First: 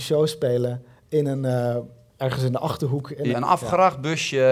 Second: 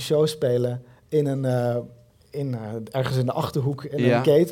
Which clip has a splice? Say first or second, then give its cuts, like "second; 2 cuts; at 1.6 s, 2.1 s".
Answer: first; 2 cuts; at 2.2 s, 3.3 s